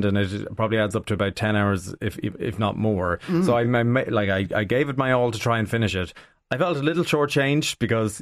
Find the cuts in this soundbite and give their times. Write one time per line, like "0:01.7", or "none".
none